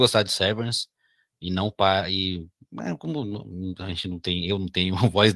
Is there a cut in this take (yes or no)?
no